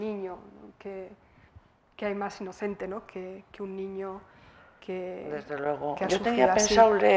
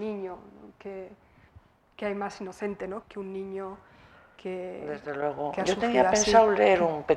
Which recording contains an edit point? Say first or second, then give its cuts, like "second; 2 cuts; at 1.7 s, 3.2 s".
second; 1 cut; at 3.0 s